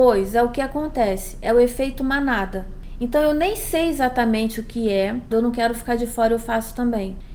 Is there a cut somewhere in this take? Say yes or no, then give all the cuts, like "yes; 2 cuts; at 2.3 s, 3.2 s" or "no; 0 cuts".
yes; 1 cut; at 5.3 s